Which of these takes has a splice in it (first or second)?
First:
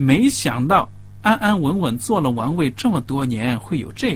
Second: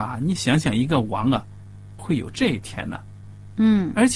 second